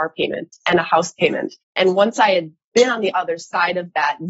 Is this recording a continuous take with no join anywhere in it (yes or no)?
no